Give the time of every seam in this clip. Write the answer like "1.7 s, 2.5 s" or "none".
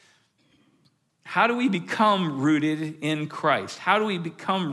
none